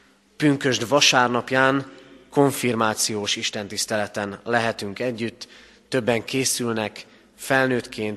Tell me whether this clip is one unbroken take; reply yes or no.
yes